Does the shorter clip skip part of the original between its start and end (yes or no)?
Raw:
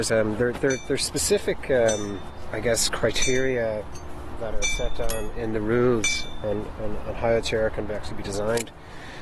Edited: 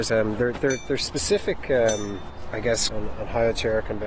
yes